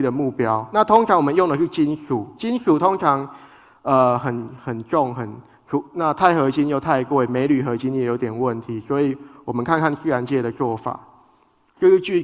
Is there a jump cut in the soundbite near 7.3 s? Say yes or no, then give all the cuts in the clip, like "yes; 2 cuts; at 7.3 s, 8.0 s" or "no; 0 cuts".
no; 0 cuts